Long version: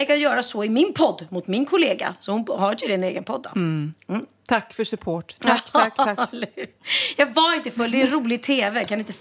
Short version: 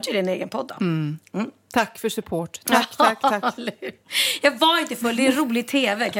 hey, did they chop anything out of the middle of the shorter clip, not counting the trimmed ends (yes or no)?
no